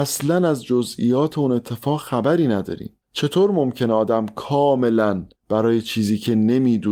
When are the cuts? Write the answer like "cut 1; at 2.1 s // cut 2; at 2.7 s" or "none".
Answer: cut 1; at 3.0 s // cut 2; at 5.4 s